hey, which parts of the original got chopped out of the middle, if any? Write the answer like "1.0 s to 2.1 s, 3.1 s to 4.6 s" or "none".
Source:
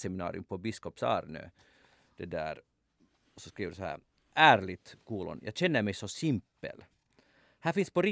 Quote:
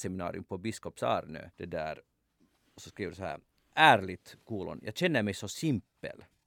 1.5 s to 2.1 s